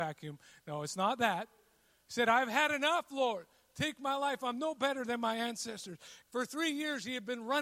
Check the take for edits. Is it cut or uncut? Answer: cut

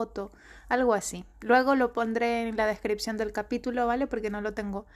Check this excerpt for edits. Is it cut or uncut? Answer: uncut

